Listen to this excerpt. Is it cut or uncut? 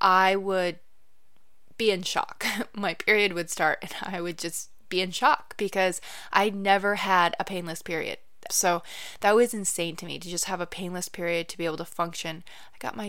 cut